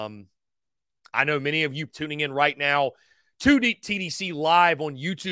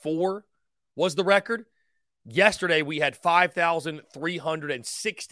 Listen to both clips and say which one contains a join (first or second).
first